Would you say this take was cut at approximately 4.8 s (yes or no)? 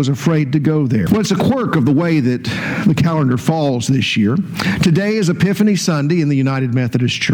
no